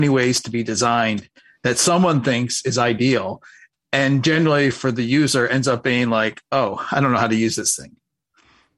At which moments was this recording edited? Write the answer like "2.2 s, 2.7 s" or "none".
none